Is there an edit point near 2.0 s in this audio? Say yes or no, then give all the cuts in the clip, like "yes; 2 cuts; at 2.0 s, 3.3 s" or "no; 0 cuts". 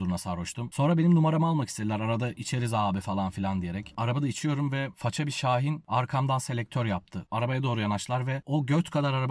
no; 1 cut; at 3.9 s